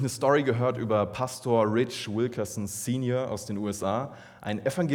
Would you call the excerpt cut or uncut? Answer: uncut